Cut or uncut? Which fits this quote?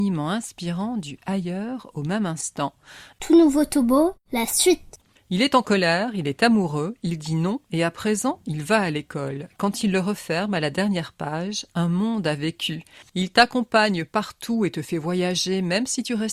cut